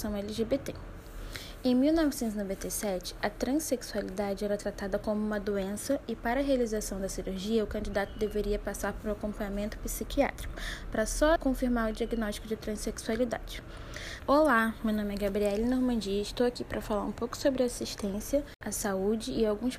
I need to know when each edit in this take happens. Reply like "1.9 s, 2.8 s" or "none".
11.4 s, 14.2 s

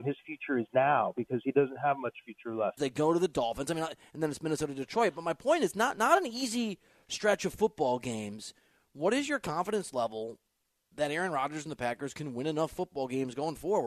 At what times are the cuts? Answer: 2.8 s

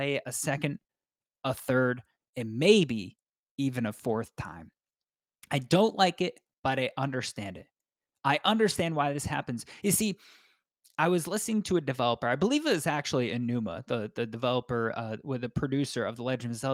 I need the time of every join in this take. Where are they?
none

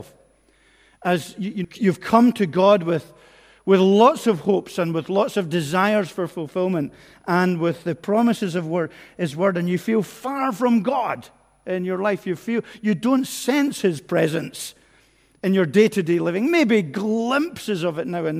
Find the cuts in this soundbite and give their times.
1.6 s

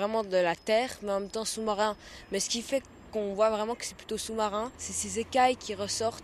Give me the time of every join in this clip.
4.7 s

